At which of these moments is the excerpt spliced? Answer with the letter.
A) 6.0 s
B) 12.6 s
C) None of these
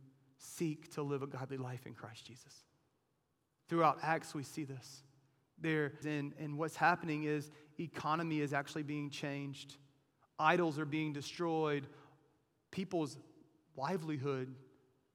A